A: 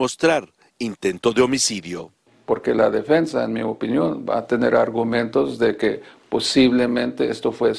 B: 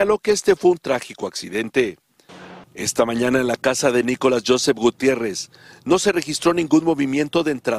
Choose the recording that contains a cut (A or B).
B